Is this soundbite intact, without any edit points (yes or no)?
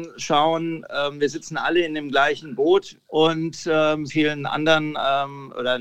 no